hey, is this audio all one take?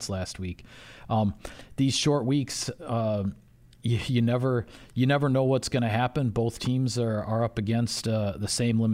yes; 0 cuts

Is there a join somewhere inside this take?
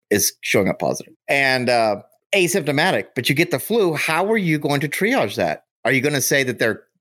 no; 0 cuts

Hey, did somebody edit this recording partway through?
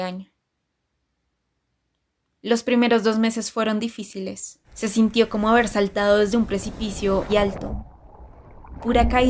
yes; 2 cuts; at 4.6 s, 7.3 s

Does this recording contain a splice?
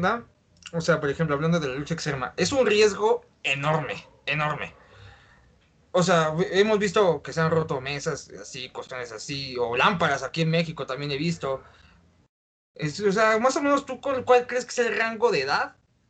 yes; 1 cut; at 12.2 s

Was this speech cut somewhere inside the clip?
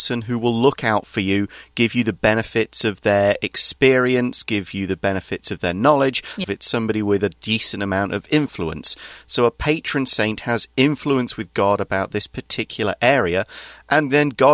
yes; 1 cut; at 6.4 s

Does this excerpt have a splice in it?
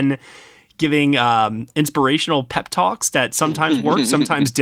no; 0 cuts

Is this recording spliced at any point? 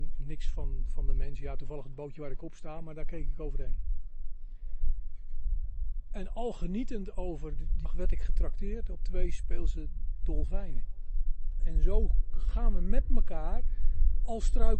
yes; 2 cuts; at 7.9 s, 11.6 s

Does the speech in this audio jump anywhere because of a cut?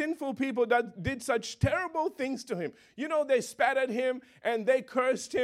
no; 0 cuts

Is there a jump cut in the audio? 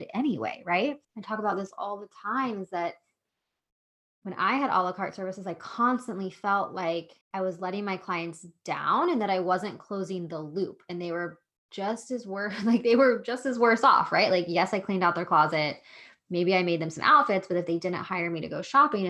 yes; 2 cuts; at 1.0 s, 7.2 s

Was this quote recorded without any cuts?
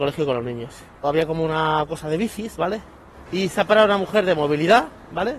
no; 2 cuts; at 1.0 s, 3.3 s

